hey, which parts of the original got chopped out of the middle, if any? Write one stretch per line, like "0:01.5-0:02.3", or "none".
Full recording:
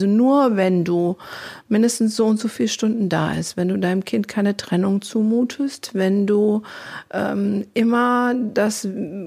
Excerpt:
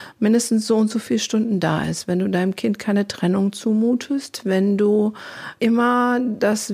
0:07.1-0:07.7